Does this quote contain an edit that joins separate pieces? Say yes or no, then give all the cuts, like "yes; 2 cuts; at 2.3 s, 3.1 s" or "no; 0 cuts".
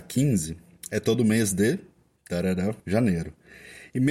yes; 1 cut; at 2.8 s